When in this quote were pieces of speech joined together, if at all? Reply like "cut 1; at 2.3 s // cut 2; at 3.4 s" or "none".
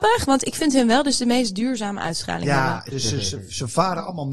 cut 1; at 2.9 s